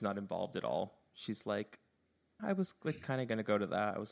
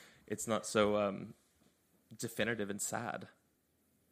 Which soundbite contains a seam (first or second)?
first